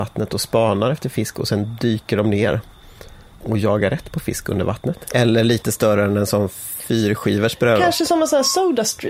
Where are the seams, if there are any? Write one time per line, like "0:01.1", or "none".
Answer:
0:05.1